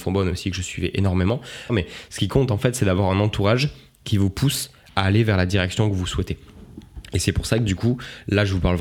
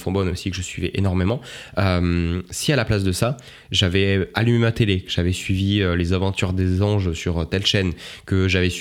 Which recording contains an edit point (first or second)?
first